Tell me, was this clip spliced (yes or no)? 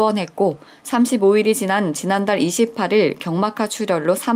no